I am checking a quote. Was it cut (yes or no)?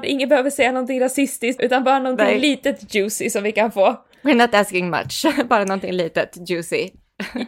yes